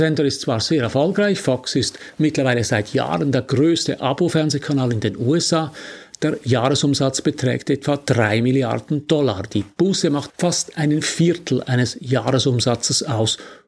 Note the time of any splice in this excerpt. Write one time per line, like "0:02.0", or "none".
0:10.3